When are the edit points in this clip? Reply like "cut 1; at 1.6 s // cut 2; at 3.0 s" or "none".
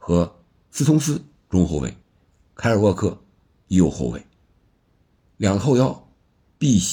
none